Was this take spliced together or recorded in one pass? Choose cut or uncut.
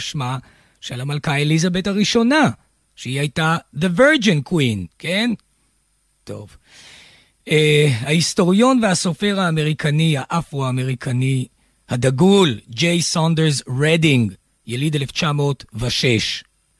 uncut